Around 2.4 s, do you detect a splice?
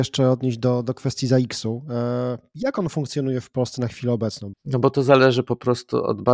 no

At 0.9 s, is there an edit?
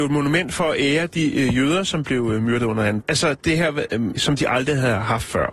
no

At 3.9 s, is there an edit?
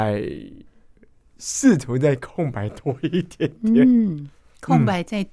no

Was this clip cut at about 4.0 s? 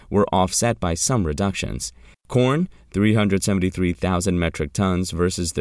no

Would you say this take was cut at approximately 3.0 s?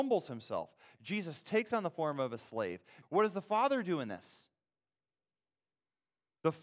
yes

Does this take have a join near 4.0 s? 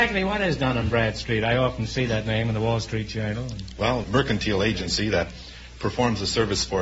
yes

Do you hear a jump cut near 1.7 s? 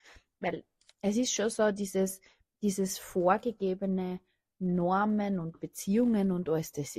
no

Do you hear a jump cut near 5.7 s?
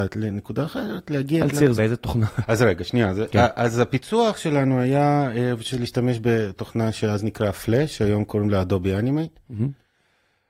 yes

